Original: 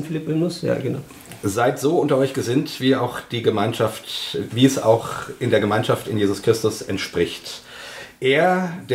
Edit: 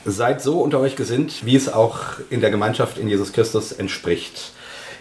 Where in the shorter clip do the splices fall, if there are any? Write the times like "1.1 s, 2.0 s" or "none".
1.4 s